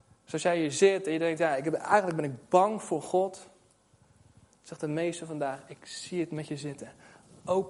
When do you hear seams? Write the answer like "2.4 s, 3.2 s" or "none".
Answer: none